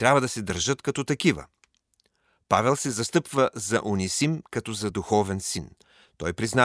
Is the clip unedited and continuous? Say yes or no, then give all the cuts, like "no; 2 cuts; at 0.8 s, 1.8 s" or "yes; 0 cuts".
yes; 0 cuts